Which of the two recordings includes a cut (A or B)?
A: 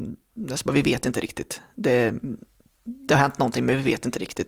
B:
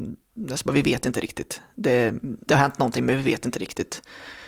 B